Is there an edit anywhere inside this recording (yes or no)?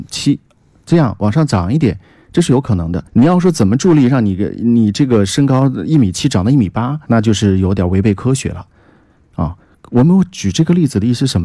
yes